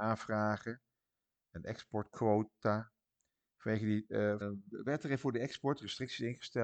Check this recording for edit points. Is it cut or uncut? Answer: cut